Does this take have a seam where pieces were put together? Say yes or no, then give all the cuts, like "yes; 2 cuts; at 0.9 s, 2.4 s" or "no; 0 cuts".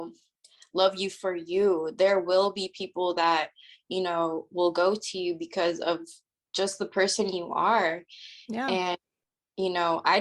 no; 0 cuts